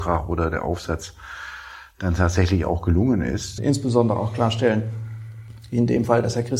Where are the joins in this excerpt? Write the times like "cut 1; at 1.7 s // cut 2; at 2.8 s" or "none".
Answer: cut 1; at 3.6 s